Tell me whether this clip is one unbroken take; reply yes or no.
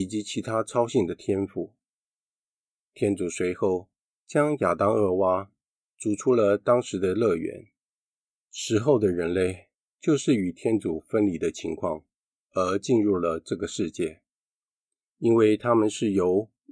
no